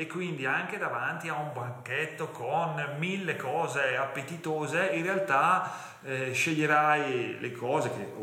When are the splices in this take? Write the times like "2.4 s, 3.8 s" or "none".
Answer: none